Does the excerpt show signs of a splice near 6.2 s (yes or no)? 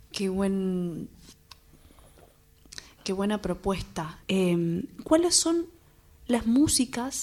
no